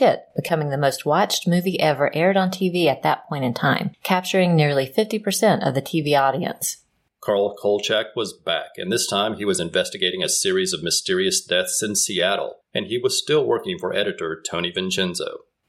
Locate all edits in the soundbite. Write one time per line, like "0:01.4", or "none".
0:07.1